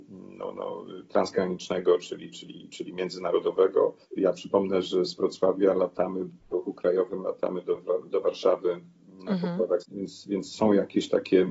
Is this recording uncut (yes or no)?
no